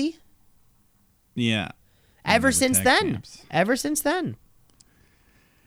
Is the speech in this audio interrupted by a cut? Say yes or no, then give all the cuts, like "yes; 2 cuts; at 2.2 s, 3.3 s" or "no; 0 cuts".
no; 0 cuts